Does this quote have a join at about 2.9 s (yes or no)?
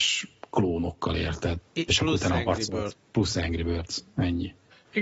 yes